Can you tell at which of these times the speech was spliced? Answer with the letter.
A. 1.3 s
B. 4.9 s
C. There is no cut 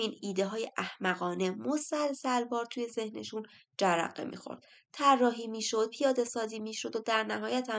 C